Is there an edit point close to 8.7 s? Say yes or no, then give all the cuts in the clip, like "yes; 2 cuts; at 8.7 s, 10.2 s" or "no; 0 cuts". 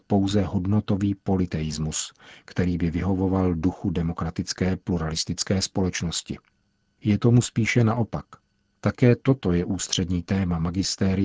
yes; 1 cut; at 8.7 s